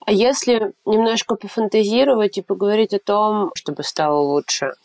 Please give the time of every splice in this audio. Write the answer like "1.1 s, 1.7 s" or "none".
3.6 s